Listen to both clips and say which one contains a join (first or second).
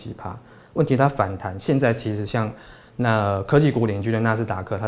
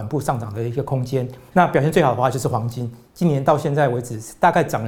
second